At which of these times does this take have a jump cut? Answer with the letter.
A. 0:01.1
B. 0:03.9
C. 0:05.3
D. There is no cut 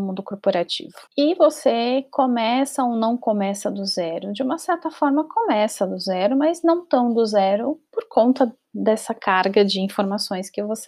A